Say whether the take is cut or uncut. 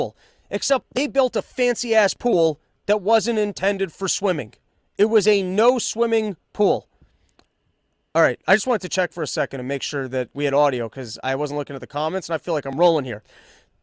cut